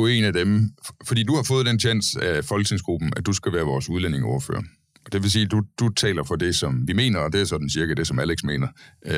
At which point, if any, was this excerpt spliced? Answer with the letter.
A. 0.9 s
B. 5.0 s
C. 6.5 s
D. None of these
D